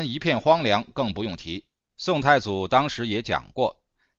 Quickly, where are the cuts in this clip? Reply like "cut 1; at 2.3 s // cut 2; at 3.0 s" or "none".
cut 1; at 1.9 s